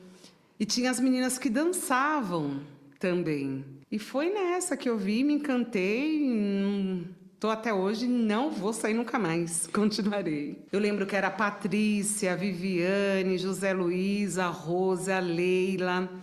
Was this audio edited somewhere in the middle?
yes; 2 cuts; at 3.8 s, 10.7 s

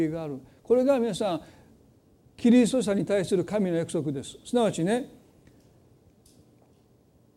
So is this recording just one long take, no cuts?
yes; 0 cuts

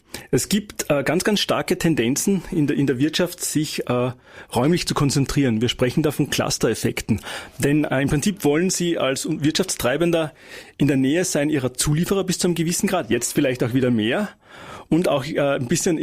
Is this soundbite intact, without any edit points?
yes; 0 cuts

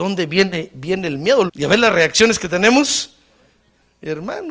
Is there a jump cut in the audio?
yes; 1 cut; at 1.5 s

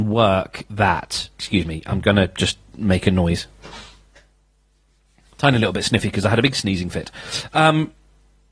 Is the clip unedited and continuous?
yes; 0 cuts

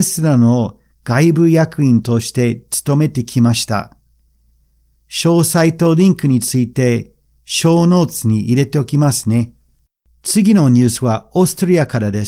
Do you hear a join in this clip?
no; 0 cuts

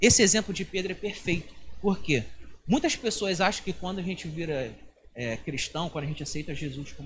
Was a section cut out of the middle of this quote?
no; 0 cuts

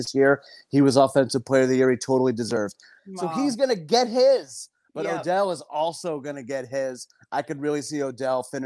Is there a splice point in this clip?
yes; 1 cut; at 3.0 s

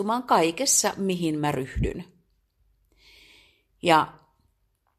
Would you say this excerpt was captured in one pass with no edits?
yes; 0 cuts

